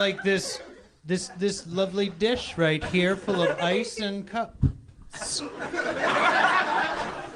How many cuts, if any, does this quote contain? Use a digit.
0